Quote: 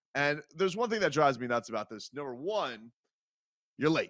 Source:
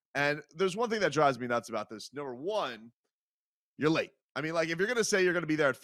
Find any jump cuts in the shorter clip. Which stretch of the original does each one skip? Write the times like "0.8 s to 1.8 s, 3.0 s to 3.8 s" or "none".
none